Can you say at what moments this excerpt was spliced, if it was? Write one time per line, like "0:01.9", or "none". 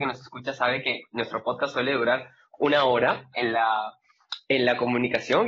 0:03.3